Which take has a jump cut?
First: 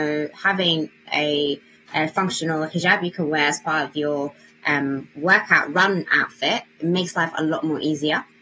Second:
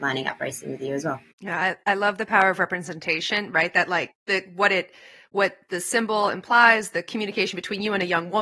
second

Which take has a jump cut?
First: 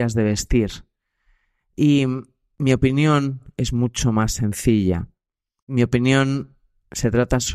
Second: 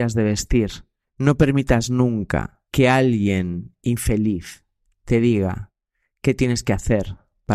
second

